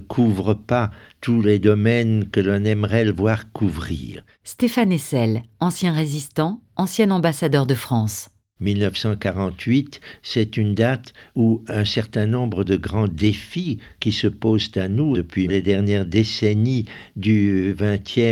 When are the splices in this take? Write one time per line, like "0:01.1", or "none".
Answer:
0:08.6
0:15.5